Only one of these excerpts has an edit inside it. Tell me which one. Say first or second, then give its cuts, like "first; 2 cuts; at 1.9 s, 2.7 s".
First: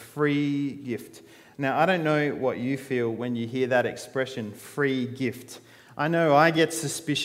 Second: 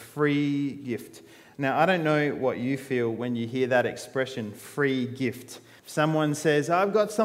second; 1 cut; at 5.8 s